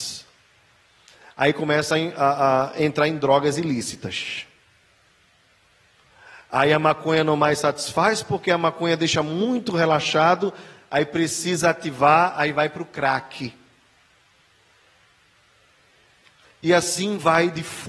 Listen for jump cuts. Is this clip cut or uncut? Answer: uncut